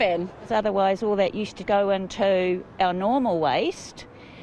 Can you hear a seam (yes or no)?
yes